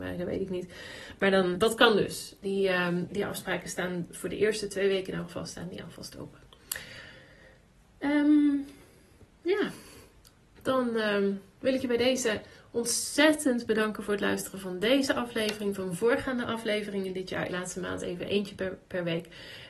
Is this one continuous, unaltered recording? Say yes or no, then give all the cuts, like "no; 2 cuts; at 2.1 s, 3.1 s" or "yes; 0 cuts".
no; 3 cuts; at 1.5 s, 3.1 s, 17.5 s